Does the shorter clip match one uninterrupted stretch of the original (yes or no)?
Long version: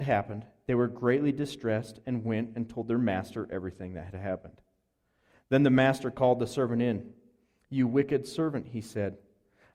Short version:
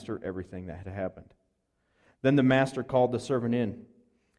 yes